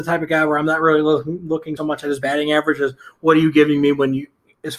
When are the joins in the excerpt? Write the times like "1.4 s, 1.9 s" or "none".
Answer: 1.8 s